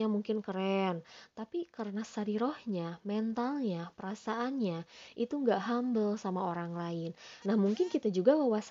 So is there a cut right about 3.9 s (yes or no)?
no